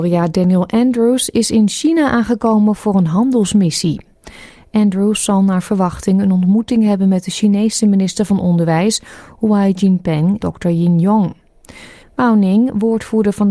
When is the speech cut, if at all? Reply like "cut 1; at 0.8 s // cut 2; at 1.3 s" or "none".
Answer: cut 1; at 10.4 s // cut 2; at 12.0 s